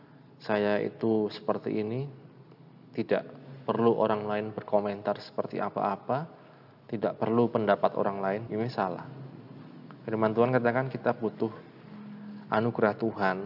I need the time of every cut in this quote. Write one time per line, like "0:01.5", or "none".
0:08.5